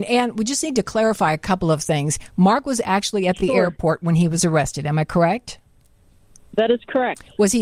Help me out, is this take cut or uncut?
uncut